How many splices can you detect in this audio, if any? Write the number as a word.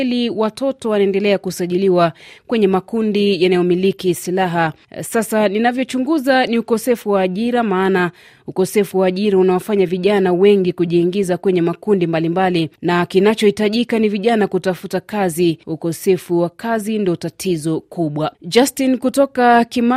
zero